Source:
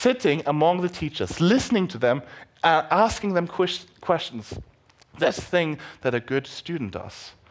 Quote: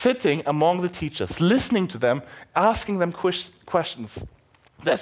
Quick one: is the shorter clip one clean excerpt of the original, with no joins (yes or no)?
no